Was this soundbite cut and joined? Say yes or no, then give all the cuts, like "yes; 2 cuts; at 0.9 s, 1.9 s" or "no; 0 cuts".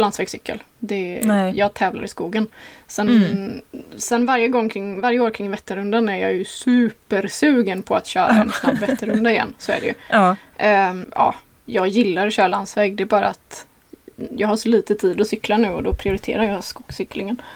no; 0 cuts